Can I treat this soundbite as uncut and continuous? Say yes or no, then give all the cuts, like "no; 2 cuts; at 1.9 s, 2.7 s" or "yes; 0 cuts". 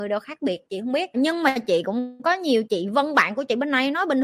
no; 2 cuts; at 1.1 s, 2.6 s